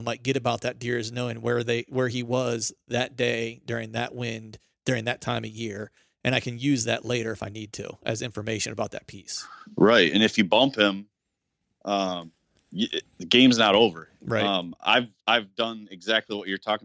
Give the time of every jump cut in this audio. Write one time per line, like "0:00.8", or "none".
none

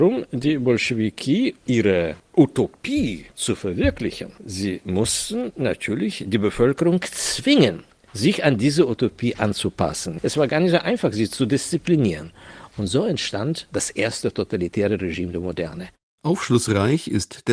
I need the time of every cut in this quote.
0:01.6

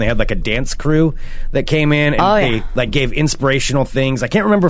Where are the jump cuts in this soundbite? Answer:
none

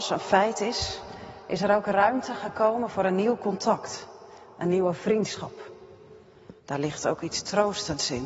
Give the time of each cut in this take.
0:06.6

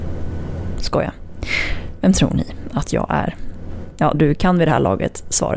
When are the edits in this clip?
0:04.1

